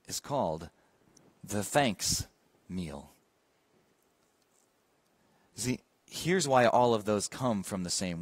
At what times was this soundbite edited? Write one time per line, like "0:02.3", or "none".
none